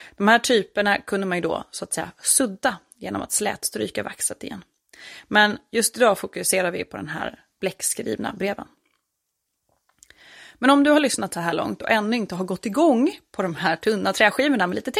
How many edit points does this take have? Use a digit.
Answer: 0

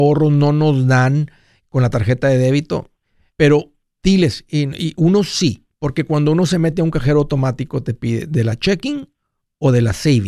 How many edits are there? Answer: 1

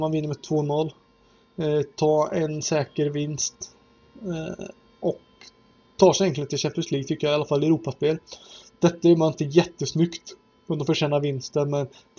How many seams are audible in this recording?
0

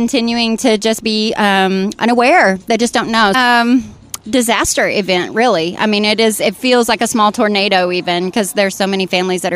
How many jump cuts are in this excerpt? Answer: 1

